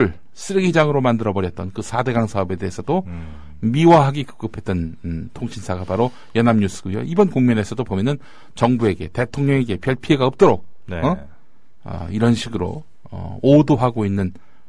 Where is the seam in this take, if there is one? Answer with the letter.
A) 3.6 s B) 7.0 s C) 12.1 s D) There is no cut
D